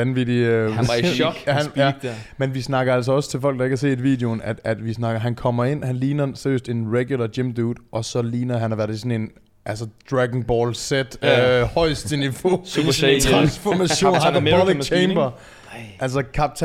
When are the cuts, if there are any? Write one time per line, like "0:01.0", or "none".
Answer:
none

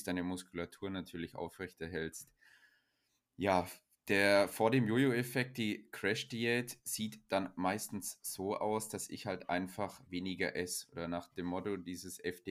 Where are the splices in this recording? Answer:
none

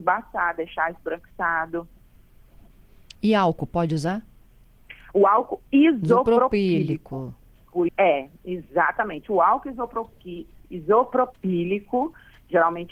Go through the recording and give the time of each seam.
0:07.9

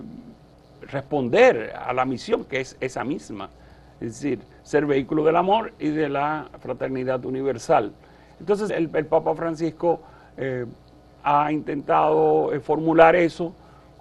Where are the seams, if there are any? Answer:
0:08.7

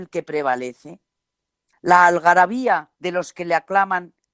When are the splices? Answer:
0:01.7
0:02.9

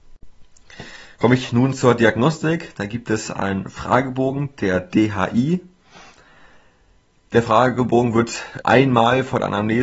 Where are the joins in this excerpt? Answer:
0:08.6

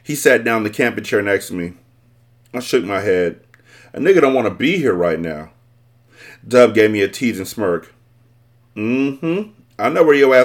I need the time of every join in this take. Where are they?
none

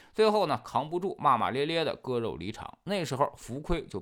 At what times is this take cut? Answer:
none

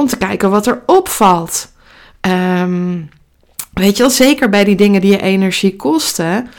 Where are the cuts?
none

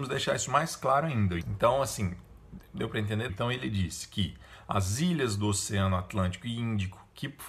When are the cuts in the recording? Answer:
0:01.4
0:03.3

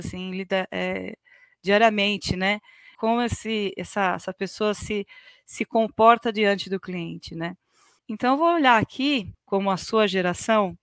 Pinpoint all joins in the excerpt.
0:02.9
0:08.0
0:09.3

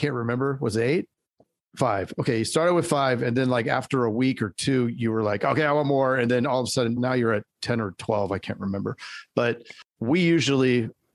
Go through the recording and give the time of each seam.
0:07.0

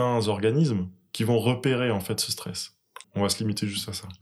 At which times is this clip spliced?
0:03.0

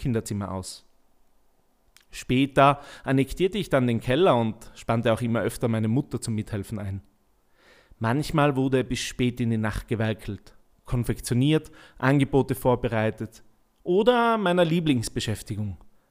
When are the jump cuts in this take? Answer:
none

